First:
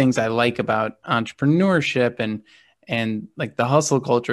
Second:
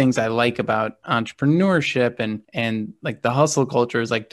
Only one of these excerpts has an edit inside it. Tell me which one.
second; 1 cut; at 2.4 s

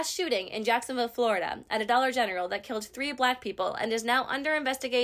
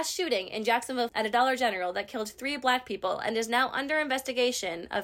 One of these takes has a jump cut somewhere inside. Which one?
second; 1 cut; at 1.1 s

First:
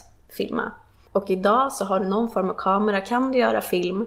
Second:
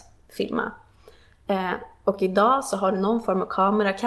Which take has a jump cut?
first; 1 cut; at 1.0 s

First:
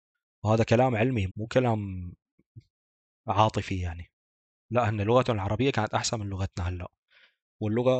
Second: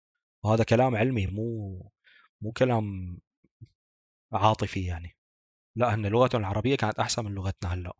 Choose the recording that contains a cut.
first; 1 cut; at 1.3 s

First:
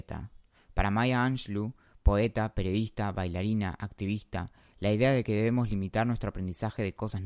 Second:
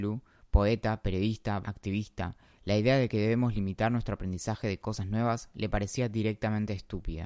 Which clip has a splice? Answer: second; 1 cut; at 1.6 s

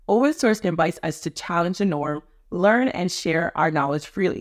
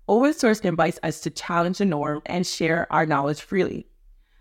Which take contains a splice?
second; 1 cut; at 2.3 s

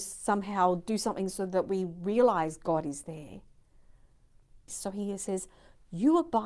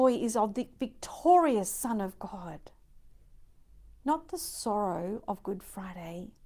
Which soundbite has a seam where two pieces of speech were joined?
first; 1 cut; at 4.7 s

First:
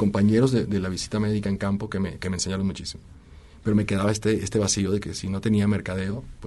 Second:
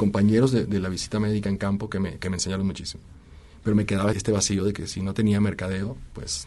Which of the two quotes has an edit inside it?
second; 1 cut; at 4.1 s

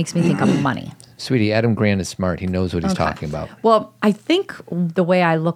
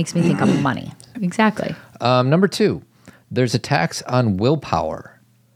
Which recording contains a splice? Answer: second; 1 cut; at 1.1 s

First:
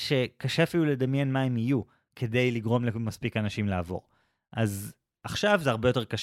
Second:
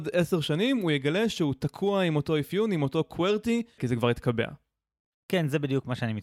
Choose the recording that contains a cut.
second; 1 cut; at 3.8 s

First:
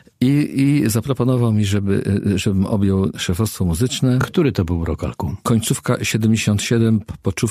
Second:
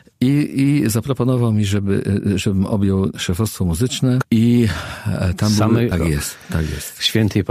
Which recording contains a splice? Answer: second; 2 cuts; at 4.2 s, 5.9 s

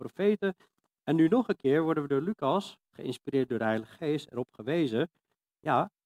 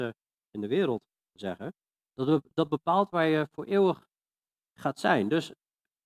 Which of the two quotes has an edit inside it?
second; 1 cut; at 2.1 s

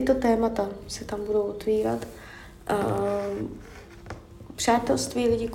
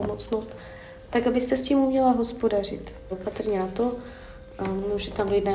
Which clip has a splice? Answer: second; 1 cut; at 3.1 s

